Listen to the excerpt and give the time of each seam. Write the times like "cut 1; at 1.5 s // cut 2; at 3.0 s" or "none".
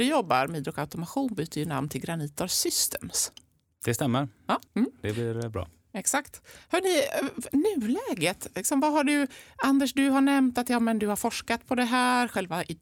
cut 1; at 4.7 s